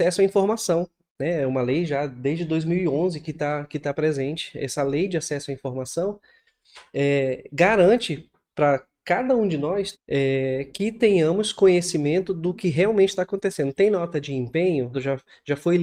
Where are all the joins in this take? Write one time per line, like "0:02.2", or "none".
0:09.9
0:14.9